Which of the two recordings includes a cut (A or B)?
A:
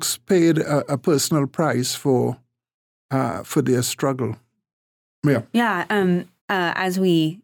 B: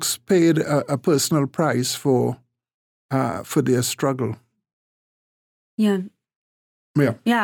A